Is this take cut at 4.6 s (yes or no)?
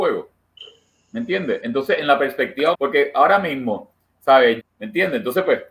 yes